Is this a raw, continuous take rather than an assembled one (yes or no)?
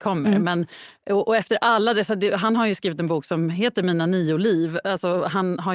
yes